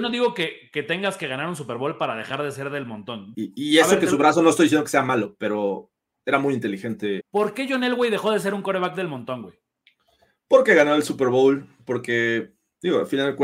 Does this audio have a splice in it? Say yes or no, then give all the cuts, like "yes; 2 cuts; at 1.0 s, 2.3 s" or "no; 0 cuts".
yes; 2 cuts; at 3.3 s, 7.2 s